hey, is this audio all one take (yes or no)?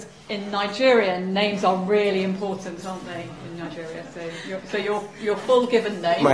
yes